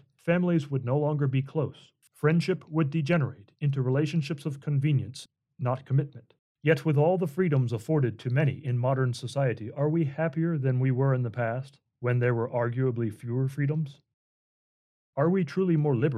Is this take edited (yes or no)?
yes